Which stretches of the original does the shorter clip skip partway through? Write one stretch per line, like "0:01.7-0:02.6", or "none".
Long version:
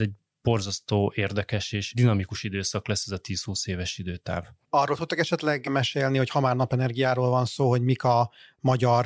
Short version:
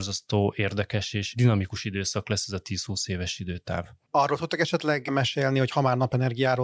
none

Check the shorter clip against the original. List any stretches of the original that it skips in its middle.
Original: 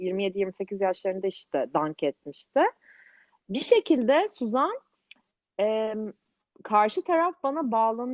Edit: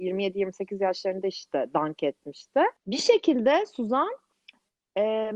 0:02.8-0:03.4

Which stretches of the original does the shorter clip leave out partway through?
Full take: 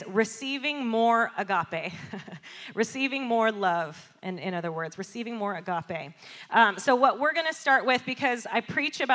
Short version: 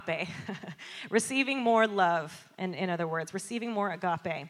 none

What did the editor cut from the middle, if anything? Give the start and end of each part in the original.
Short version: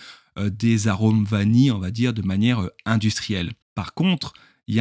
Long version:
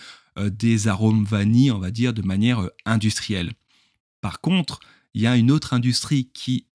0:03.6-0:04.1

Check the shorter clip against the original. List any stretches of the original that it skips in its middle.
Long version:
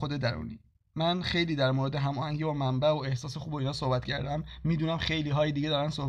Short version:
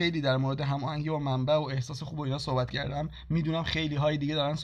none

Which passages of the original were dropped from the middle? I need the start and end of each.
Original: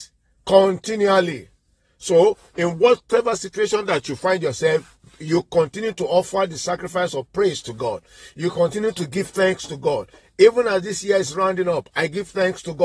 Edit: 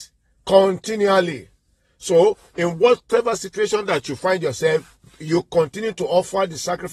none

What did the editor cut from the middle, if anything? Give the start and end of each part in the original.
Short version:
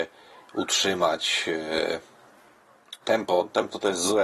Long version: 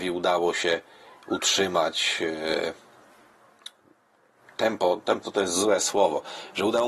0:03.7-0:04.5

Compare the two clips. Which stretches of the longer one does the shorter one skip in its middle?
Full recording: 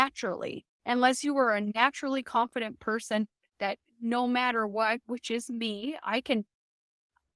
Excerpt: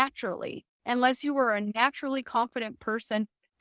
none

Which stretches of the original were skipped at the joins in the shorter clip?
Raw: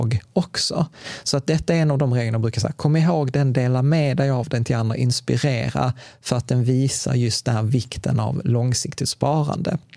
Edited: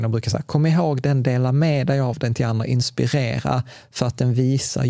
none

